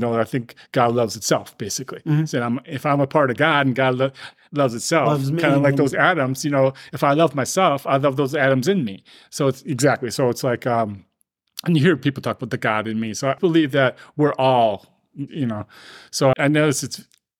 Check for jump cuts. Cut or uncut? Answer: cut